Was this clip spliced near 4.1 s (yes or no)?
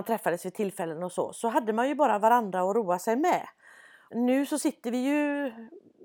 yes